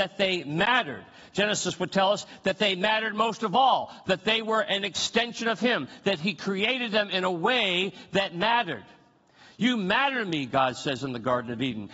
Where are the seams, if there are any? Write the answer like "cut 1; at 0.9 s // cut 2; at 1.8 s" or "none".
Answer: none